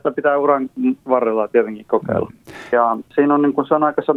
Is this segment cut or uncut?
cut